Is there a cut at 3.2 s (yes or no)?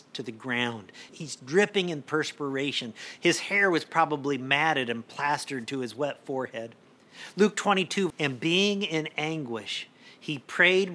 no